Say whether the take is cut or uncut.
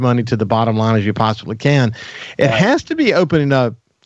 uncut